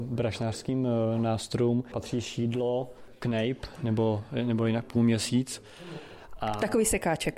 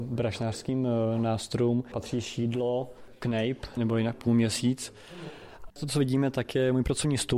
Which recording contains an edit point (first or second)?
second